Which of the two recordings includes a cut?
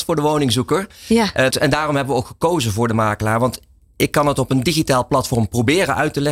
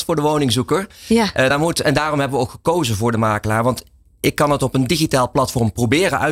first; 1 cut; at 1.5 s

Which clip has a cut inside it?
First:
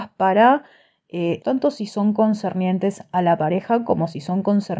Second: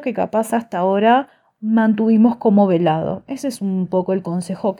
first; 1 cut; at 1.4 s

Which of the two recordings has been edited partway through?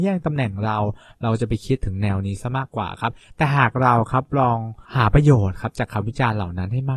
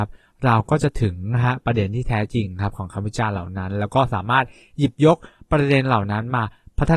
first; 1 cut; at 4.8 s

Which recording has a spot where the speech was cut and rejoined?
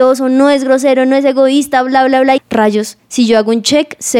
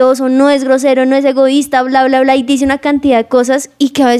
first; 1 cut; at 2.4 s

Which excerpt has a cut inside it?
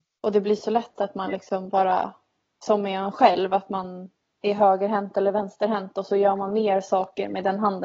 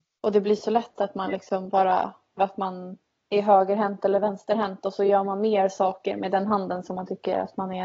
second; 1 cut; at 2.4 s

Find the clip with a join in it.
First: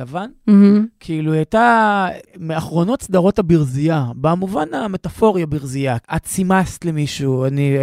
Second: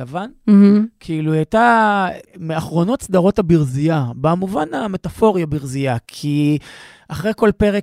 first; 1 cut; at 6.0 s

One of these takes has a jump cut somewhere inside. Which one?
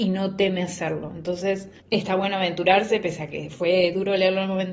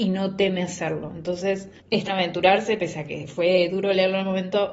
second; 1 cut; at 2.1 s

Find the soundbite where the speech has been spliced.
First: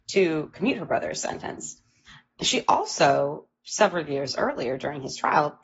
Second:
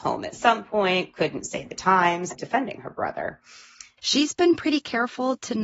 second; 2 cuts; at 2.3 s, 4.0 s

